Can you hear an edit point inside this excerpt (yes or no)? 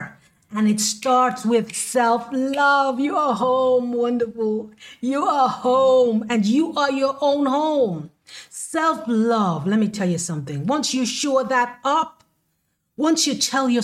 no